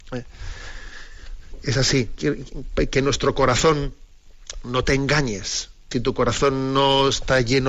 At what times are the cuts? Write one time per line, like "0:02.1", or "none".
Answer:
0:02.2
0:05.9

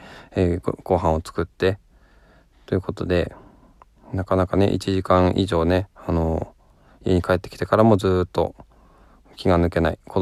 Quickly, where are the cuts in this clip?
none

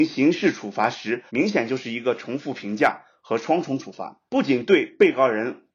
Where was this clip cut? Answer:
0:01.3
0:04.3

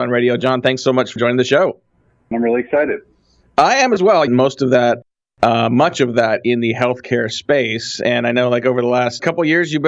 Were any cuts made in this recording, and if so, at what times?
0:02.3
0:04.3

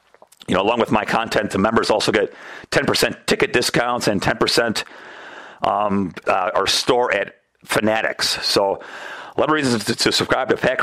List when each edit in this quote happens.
0:06.3

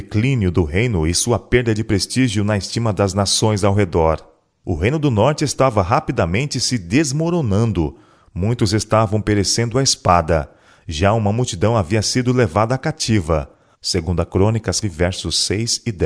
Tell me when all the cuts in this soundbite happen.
0:13.7
0:14.8

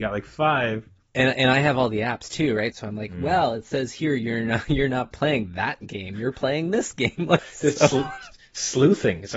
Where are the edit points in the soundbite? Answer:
0:02.7
0:07.4

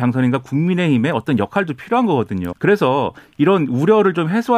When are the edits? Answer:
0:02.5

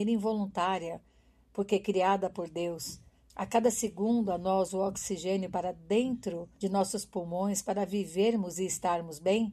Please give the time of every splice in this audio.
0:03.3
0:06.5

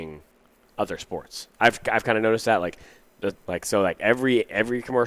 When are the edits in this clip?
0:03.4

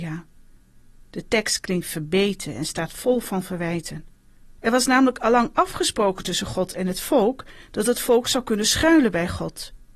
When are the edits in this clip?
0:04.6

